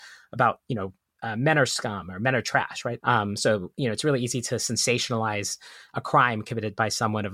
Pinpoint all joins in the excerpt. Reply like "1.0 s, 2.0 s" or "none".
3.0 s